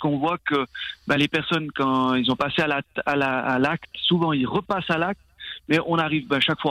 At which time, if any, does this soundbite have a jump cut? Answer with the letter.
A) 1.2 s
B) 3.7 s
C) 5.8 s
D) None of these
D